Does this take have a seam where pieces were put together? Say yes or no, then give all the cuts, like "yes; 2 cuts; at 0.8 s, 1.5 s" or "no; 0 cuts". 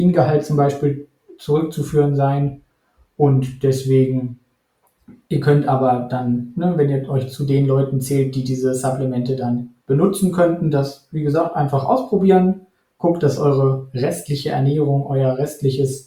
yes; 1 cut; at 9.8 s